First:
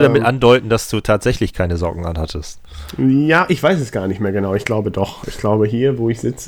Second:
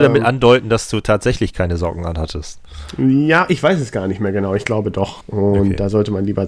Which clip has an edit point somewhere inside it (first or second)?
second